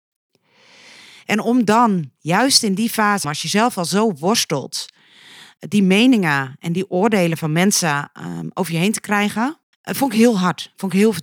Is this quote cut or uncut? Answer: cut